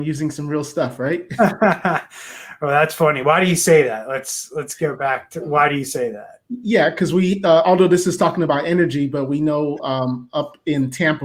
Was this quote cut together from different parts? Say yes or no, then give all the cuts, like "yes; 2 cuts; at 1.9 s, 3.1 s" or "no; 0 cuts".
no; 0 cuts